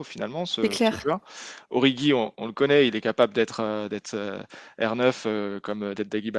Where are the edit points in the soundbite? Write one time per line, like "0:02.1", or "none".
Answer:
none